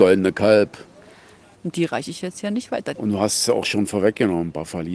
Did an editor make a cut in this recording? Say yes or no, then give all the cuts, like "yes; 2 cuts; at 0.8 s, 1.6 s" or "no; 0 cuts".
yes; 2 cuts; at 1.5 s, 2.9 s